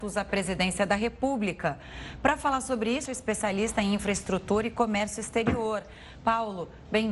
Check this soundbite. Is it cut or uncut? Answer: cut